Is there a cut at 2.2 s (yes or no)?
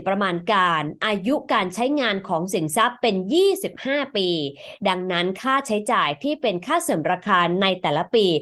no